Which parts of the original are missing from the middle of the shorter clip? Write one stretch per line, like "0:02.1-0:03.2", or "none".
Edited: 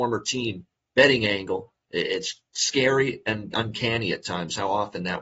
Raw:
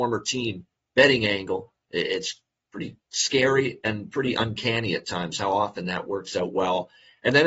0:02.5-0:03.1
0:04.1-0:04.3